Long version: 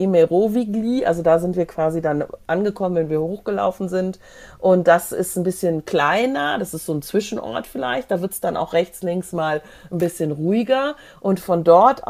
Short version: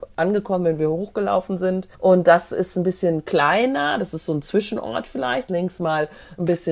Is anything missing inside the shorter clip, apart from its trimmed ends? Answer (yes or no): yes